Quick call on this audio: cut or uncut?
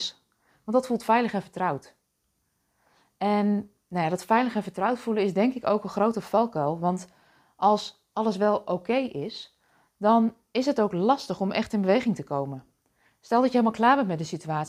uncut